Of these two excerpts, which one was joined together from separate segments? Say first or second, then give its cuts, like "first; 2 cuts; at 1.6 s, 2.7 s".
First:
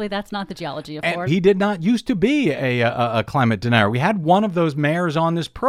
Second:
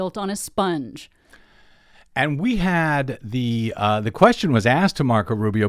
first; 1 cut; at 1.3 s